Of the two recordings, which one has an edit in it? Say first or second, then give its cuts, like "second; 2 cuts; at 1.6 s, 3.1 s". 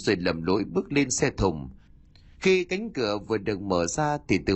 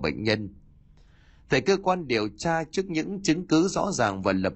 first; 1 cut; at 2.3 s